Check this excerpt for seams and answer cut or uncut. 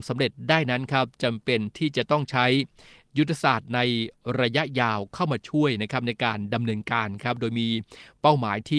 uncut